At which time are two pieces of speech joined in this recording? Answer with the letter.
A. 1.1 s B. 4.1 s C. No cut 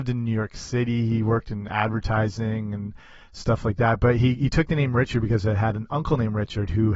C